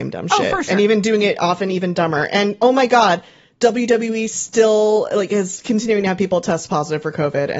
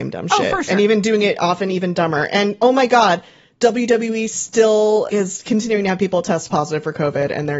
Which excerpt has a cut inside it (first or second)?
second